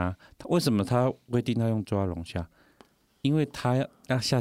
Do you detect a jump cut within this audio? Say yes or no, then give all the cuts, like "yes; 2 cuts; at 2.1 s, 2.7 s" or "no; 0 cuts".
no; 0 cuts